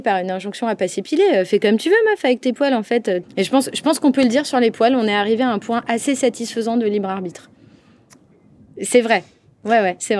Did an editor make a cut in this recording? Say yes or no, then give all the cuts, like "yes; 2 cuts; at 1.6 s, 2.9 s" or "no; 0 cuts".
yes; 1 cut; at 3.2 s